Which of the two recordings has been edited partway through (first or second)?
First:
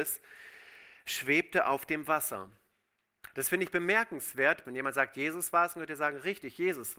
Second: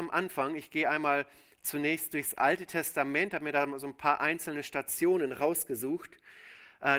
first